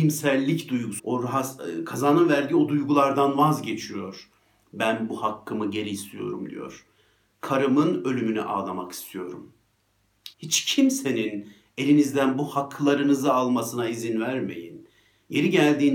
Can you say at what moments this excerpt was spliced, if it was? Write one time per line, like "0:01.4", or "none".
0:01.0
0:10.3